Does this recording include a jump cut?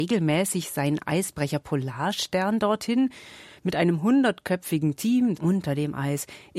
yes; 1 cut; at 5.4 s

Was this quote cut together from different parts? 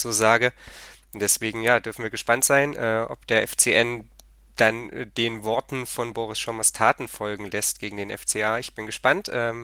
no; 0 cuts

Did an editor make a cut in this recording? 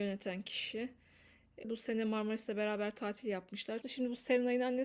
yes; 2 cuts; at 1.6 s, 3.8 s

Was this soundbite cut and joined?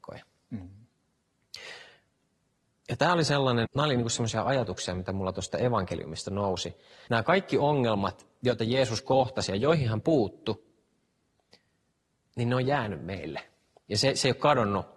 yes; 2 cuts; at 3.7 s, 7.1 s

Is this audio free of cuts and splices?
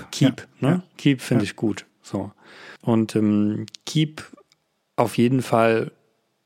no; 1 cut; at 2.8 s

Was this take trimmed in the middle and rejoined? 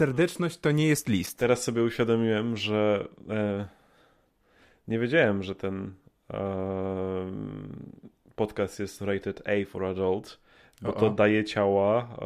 no; 0 cuts

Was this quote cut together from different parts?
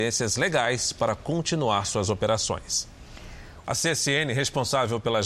yes; 1 cut; at 3.6 s

